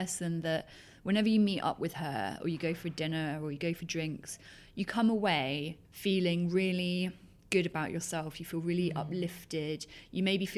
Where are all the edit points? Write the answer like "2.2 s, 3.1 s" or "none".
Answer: 5.8 s